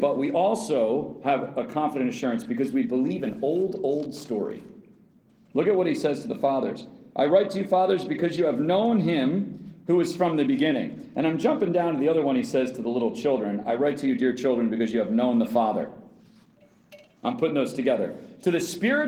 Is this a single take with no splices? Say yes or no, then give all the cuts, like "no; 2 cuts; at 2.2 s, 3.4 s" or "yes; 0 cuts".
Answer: yes; 0 cuts